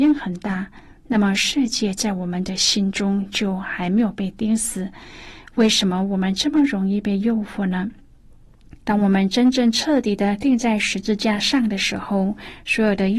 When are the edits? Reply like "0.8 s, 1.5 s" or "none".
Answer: 8.8 s